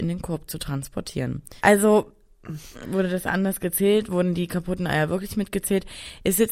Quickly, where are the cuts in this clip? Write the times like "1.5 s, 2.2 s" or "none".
1.6 s, 2.8 s